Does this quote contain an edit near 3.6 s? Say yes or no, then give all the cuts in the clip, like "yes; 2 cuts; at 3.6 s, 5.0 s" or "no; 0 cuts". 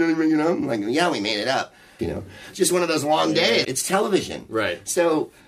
yes; 2 cuts; at 2.0 s, 3.6 s